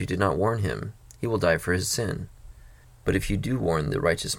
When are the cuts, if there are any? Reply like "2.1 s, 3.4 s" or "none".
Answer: 2.8 s